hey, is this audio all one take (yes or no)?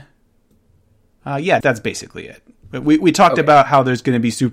no